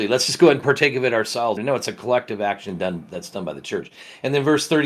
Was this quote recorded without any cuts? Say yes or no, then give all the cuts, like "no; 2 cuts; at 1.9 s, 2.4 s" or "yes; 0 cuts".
no; 1 cut; at 1.6 s